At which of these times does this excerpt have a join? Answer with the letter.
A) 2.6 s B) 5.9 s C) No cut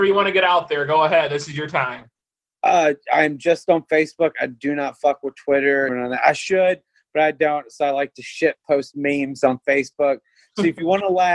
B